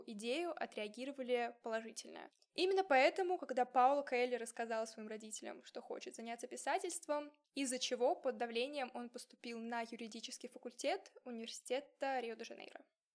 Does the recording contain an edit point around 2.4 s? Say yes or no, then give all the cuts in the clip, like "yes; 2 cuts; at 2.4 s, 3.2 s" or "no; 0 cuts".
yes; 2 cuts; at 2.4 s, 7.4 s